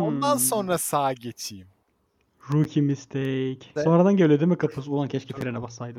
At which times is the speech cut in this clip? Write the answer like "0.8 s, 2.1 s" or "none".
3.8 s